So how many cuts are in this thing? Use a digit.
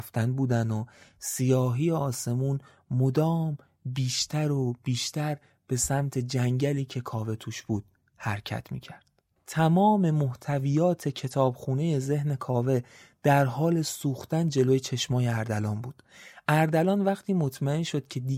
1